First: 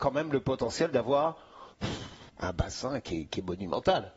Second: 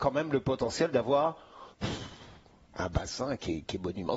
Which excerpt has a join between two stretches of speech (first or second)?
first